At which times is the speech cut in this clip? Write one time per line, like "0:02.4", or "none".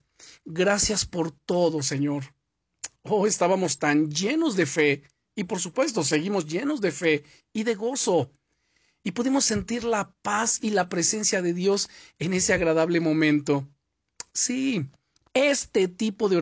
none

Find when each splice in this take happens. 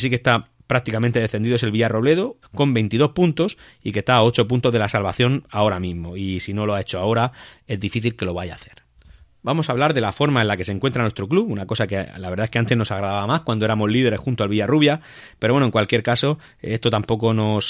0:02.4

